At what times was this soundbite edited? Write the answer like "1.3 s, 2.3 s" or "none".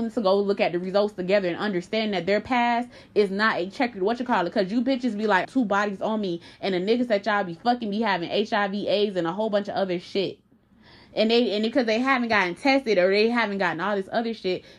5.4 s